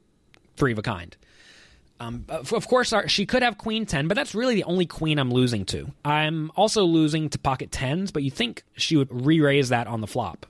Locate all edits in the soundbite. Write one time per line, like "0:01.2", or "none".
0:06.0
0:09.1

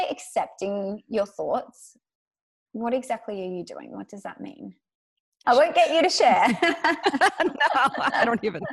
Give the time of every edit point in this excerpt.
0:05.4

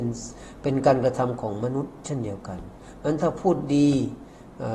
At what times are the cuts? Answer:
none

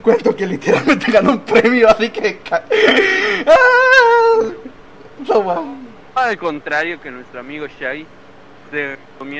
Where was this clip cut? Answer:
none

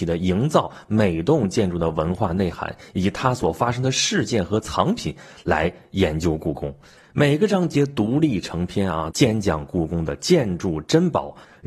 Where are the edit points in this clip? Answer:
0:07.0
0:09.1

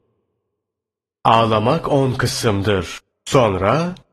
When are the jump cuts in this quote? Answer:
0:03.1

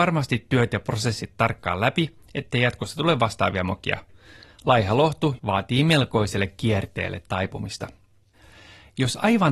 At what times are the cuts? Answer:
0:05.4

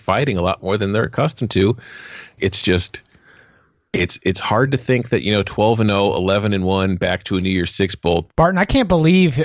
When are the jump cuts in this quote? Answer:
0:02.4
0:08.3

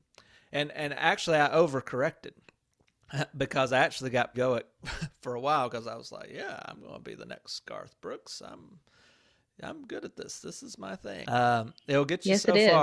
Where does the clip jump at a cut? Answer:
0:04.3
0:11.2

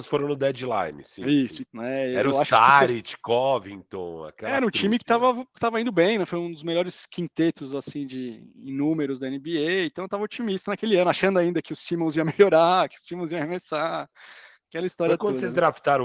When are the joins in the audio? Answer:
0:01.6

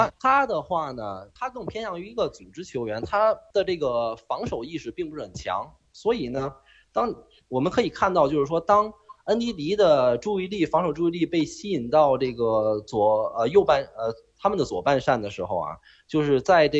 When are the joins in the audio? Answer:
none

